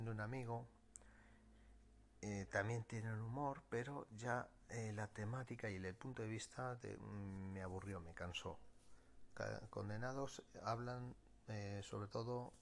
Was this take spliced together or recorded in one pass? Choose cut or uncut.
uncut